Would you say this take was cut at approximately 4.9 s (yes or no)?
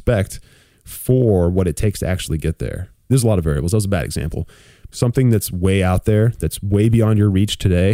yes